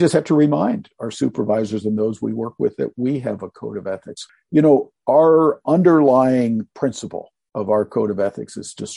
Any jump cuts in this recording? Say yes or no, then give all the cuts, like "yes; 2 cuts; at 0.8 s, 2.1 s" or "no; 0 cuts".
no; 0 cuts